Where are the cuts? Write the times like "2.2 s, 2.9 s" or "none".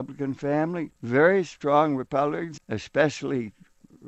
0.9 s, 2.6 s